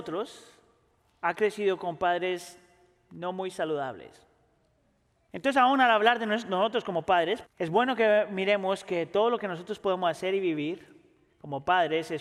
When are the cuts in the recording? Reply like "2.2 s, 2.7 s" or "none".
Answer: 5.3 s, 7.4 s

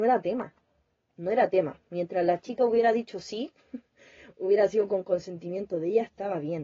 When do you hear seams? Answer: none

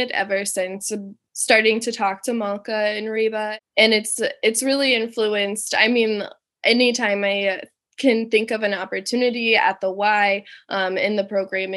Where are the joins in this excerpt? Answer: none

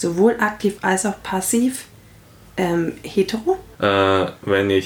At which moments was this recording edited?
3.7 s

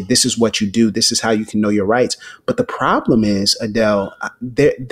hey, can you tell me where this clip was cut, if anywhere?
none

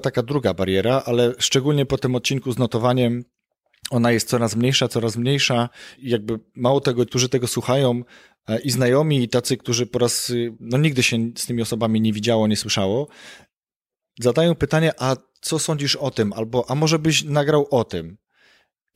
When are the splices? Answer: 6.0 s, 7.1 s, 10.6 s

